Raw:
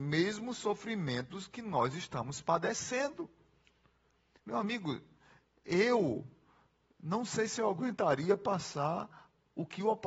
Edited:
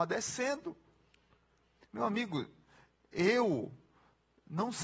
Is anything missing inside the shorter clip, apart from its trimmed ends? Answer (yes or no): no